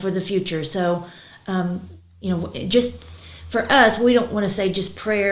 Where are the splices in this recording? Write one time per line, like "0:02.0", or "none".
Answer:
none